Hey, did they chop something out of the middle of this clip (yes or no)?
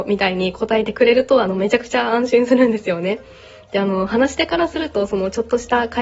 no